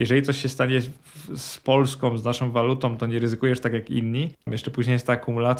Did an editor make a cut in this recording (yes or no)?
yes